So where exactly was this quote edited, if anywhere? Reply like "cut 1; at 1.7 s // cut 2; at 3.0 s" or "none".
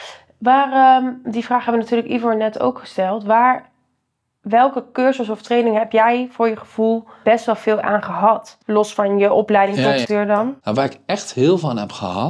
cut 1; at 7.2 s // cut 2; at 10.0 s